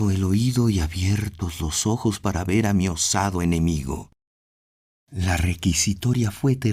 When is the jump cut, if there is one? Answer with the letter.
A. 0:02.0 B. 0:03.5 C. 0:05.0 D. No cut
C